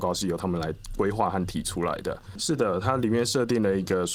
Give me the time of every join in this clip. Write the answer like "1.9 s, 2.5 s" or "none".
2.4 s

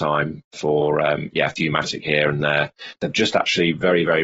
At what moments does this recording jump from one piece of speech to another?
none

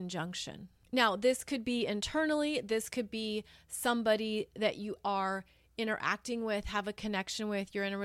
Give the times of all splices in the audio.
5.0 s

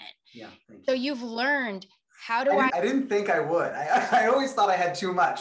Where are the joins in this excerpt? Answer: 2.7 s

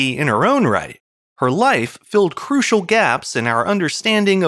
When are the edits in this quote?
1.2 s

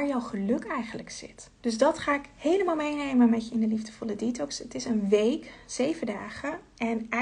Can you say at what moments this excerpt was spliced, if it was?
1.6 s

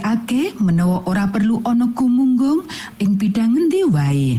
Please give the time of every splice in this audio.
none

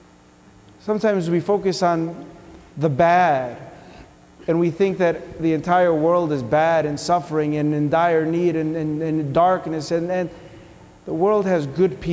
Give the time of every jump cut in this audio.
none

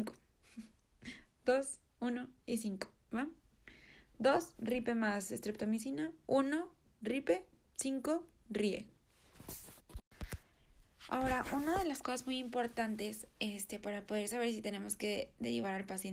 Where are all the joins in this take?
none

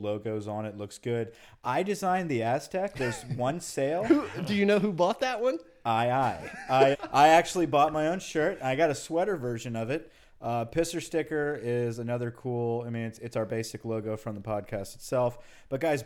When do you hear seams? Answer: 6.9 s

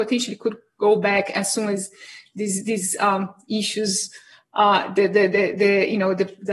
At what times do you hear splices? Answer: none

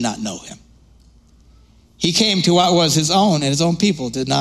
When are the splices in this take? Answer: none

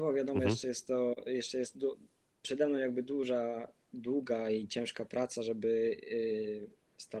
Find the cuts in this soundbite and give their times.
none

